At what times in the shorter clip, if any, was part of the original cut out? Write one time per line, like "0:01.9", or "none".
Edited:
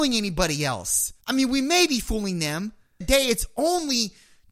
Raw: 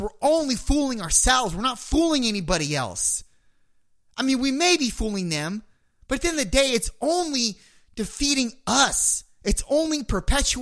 0:01.2
0:03.0